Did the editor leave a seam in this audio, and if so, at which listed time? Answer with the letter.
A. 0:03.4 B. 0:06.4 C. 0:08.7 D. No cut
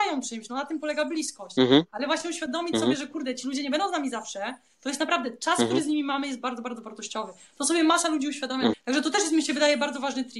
C